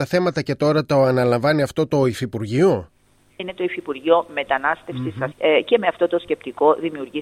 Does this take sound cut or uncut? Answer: cut